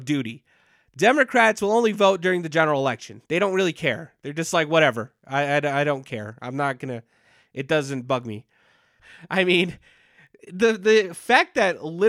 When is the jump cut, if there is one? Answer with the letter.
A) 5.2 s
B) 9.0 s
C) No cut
B